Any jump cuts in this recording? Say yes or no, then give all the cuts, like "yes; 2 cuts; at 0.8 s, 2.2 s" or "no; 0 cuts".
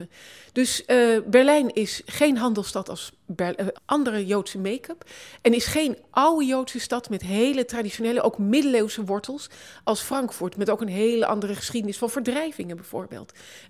yes; 1 cut; at 3.7 s